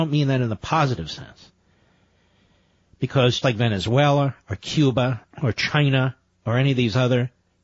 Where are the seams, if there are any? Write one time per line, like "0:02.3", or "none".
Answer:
0:03.4